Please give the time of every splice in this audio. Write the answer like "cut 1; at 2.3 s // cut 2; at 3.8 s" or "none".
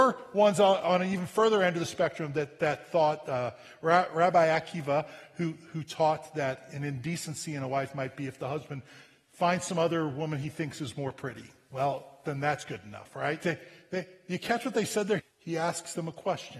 cut 1; at 13.4 s // cut 2; at 15.2 s